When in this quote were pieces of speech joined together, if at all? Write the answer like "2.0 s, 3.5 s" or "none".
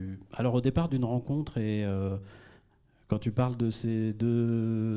none